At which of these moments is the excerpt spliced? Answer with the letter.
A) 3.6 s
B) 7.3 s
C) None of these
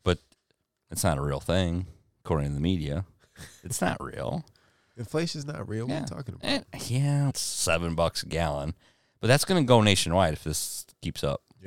B